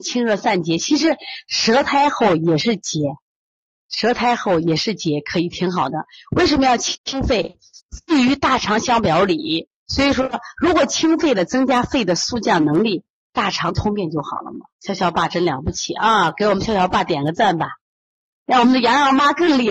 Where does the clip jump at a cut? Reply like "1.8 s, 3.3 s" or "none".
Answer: 14.7 s